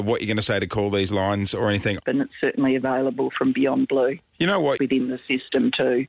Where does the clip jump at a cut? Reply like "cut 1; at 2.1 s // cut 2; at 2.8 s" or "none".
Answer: cut 1; at 2.0 s // cut 2; at 4.8 s